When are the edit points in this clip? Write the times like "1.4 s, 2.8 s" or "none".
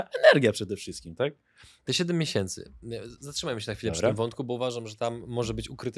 none